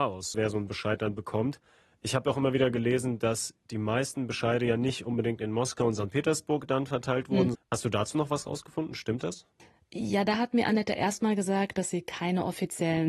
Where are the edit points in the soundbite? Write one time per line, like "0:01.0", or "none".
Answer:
0:07.5